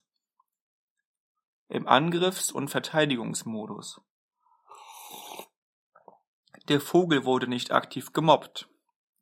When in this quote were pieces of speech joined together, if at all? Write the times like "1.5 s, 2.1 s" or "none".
none